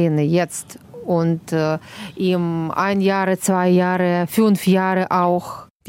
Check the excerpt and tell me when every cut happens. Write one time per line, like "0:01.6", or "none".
none